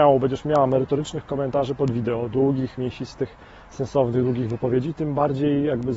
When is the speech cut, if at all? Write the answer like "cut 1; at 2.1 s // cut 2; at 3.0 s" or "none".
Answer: none